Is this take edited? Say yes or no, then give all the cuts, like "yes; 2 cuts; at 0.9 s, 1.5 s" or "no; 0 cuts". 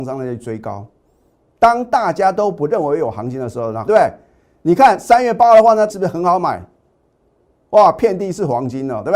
yes; 2 cuts; at 3.9 s, 5.9 s